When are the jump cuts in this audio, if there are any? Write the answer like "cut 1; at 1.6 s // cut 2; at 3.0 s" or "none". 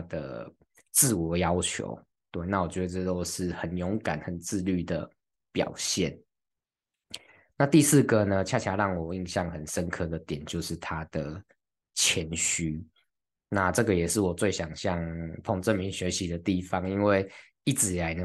none